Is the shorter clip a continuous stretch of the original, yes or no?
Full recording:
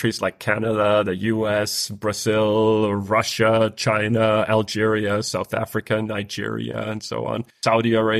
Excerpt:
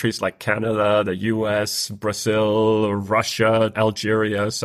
no